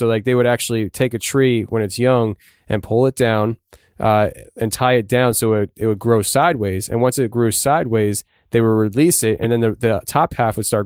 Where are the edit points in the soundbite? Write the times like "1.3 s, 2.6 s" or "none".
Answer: none